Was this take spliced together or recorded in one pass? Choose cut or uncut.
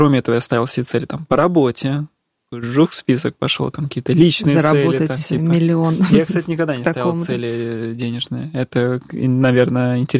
uncut